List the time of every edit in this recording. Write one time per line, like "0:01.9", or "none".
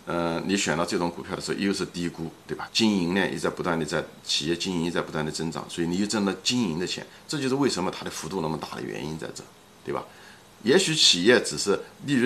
0:02.7
0:10.5